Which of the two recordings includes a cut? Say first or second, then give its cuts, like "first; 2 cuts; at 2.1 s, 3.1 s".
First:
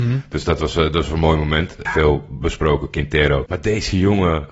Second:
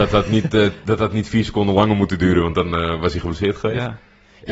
first; 2 cuts; at 1.9 s, 3.5 s